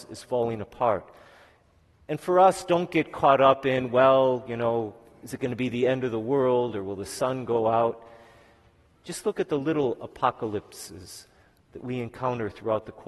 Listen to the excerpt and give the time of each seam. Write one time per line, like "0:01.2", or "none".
none